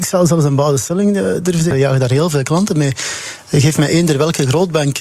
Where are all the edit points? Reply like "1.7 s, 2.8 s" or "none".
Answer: 1.7 s